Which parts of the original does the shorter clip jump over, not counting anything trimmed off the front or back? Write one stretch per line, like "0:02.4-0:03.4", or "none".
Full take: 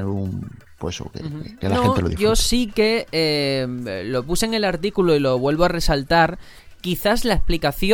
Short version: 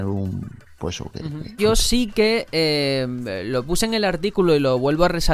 0:01.6-0:02.2

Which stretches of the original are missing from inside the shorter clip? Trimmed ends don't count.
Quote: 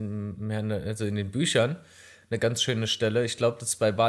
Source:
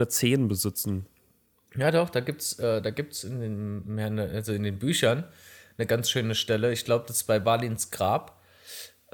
none

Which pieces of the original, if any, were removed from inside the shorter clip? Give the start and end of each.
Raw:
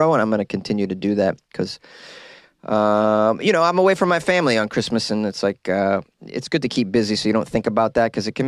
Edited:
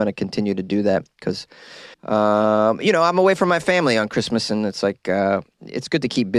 0:02.3-0:02.5

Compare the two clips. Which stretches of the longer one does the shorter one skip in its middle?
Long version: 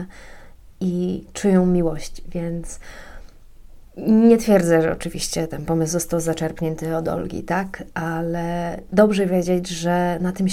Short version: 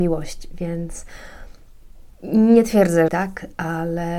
0:04.8-0:07.5

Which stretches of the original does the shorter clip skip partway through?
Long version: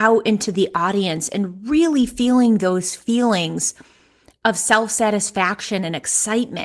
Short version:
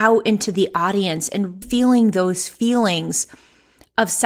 0:01.6-0:02.1

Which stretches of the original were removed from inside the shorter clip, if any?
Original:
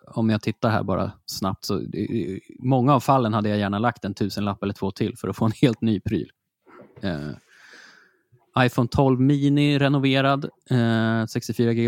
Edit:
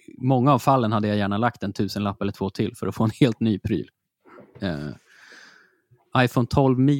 none

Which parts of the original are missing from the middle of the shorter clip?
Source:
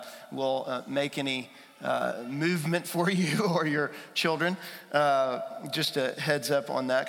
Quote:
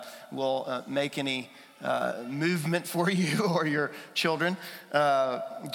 none

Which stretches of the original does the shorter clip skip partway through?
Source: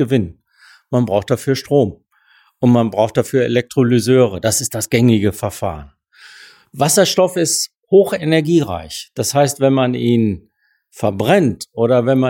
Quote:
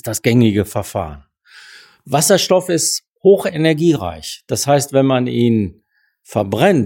none

